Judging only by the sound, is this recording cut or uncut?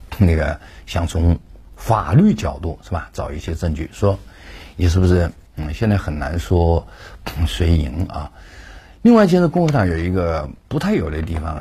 cut